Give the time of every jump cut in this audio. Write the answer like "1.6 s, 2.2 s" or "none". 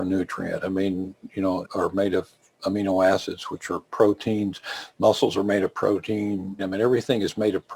1.6 s, 6.6 s